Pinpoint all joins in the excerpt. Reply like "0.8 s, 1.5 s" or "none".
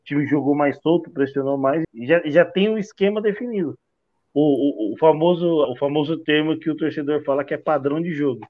1.8 s, 5.6 s